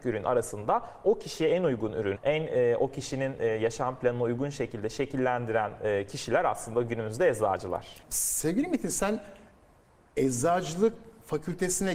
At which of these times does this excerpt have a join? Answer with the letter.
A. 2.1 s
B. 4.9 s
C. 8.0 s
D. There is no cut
A